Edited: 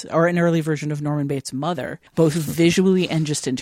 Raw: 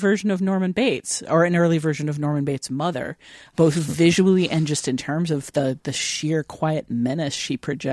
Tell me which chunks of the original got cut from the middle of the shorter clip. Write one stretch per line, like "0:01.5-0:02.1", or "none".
0:03.2-0:03.5